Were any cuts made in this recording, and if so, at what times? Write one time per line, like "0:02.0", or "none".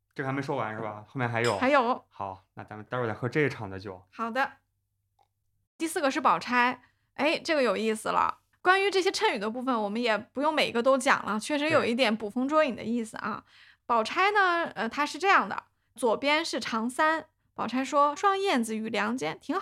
0:18.2